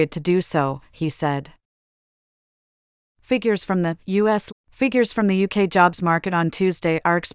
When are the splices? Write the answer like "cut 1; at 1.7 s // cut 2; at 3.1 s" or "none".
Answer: cut 1; at 4.5 s